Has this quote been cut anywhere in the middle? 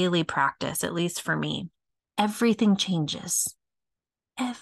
yes; 1 cut; at 2.0 s

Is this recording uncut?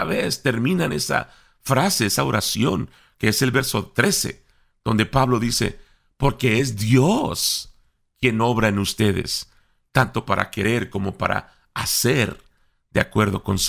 yes; 0 cuts

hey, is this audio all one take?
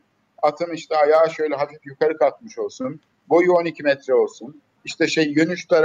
yes; 0 cuts

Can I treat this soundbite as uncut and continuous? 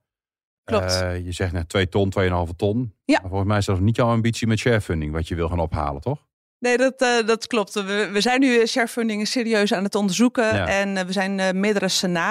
yes; 0 cuts

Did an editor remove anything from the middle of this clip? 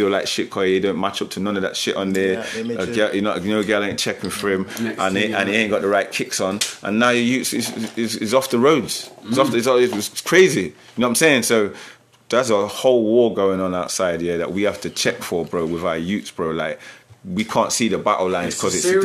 no; 0 cuts

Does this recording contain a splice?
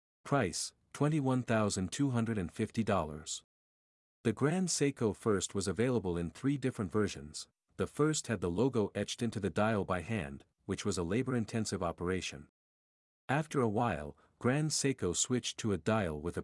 no; 0 cuts

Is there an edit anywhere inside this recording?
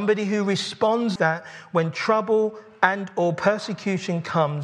yes; 1 cut; at 1.2 s

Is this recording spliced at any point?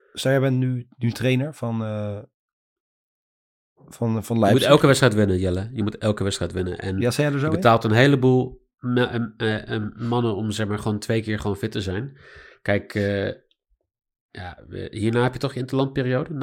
no; 0 cuts

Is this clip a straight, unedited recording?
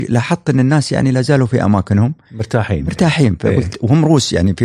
yes; 0 cuts

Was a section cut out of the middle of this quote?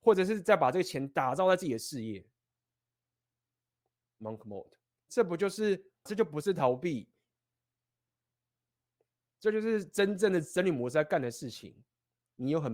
yes; 1 cut; at 6.1 s

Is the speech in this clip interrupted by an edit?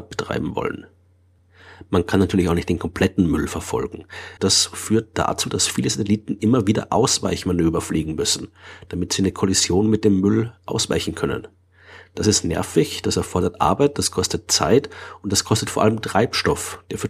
yes; 1 cut; at 4.4 s

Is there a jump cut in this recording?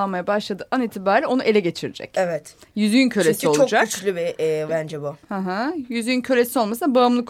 yes; 1 cut; at 4.7 s

